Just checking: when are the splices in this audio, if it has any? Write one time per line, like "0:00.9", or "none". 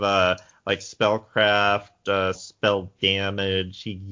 0:02.4